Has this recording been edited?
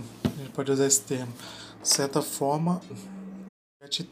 yes; 2 cuts; at 1.8 s, 2.9 s

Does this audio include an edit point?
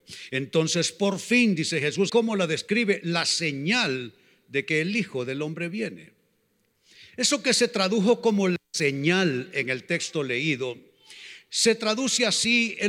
yes; 1 cut; at 2.1 s

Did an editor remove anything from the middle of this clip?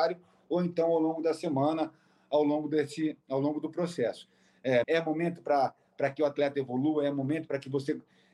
yes; 1 cut; at 4.8 s

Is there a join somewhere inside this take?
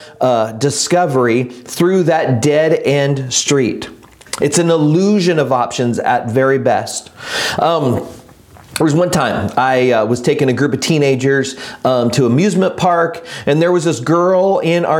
no; 0 cuts

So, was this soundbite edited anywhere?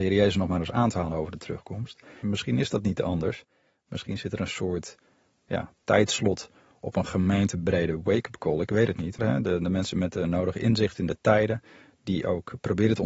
yes; 2 cuts; at 2.2 s, 9.2 s

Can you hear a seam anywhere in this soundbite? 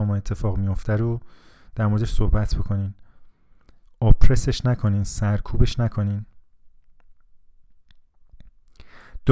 no; 0 cuts

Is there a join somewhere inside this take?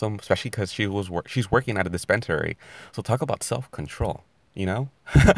no; 0 cuts

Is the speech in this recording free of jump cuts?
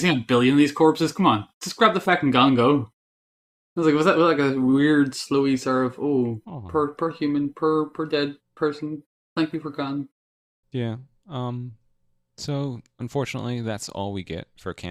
yes; 0 cuts

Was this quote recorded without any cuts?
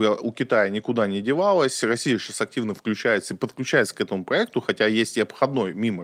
yes; 0 cuts

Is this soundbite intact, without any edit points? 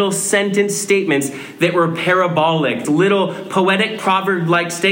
no; 1 cut; at 2.8 s

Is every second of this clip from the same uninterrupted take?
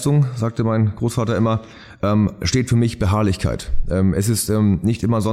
yes; 0 cuts

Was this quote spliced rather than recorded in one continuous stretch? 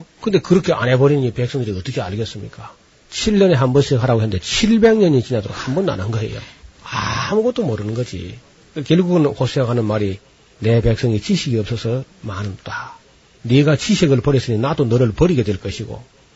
yes; 2 cuts; at 3.0 s, 6.7 s

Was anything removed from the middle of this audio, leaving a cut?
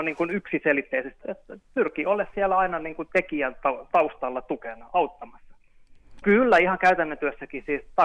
yes; 2 cuts; at 1.2 s, 6.2 s

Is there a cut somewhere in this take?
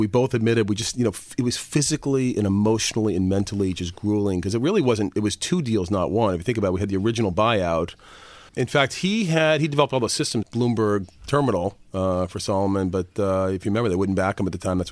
yes; 2 cuts; at 8.5 s, 10.4 s

